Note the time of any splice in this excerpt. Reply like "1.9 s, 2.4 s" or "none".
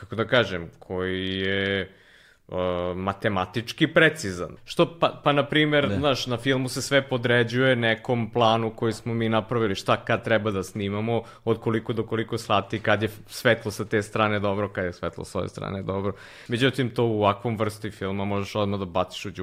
4.6 s, 16.5 s